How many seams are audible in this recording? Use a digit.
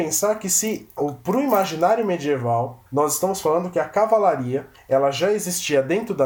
2